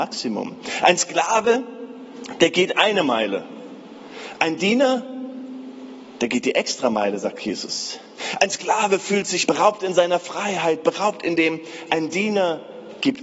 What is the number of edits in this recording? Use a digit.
1